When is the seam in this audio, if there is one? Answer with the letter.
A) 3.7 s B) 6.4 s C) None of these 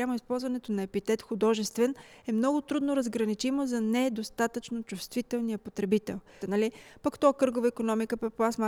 B